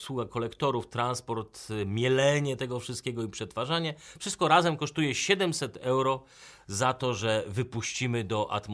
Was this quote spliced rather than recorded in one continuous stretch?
no; 0 cuts

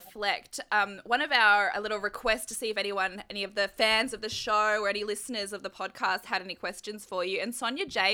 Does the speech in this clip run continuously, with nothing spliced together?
no; 1 cut; at 1.7 s

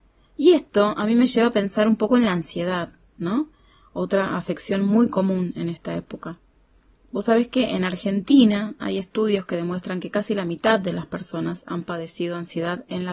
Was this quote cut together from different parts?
no; 0 cuts

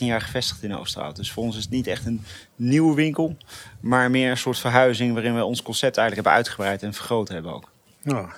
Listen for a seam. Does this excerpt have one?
no; 0 cuts

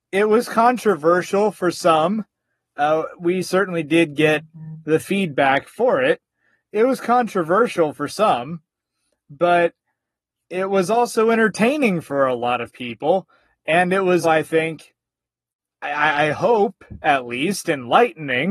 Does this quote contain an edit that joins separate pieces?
yes; 1 cut; at 14.2 s

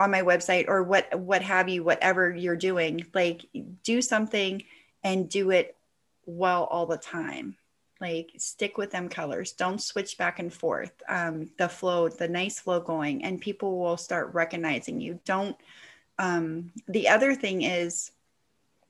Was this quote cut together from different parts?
yes; 1 cut; at 11.5 s

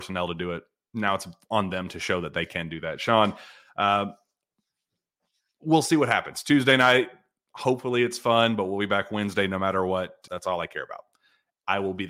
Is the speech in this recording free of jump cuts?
no; 1 cut; at 10.3 s

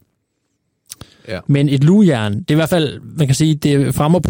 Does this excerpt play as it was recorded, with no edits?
no; 1 cut; at 1.5 s

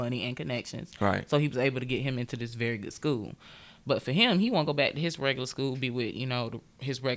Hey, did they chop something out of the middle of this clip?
no; 0 cuts

